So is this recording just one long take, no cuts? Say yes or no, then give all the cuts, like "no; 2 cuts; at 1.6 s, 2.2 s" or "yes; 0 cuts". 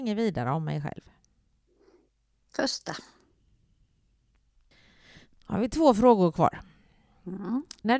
yes; 0 cuts